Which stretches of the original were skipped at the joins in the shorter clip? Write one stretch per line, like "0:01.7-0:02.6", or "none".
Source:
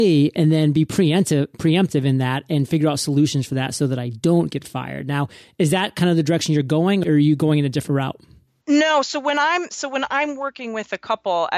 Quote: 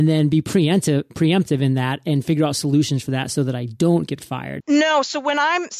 0:05.0-0:08.6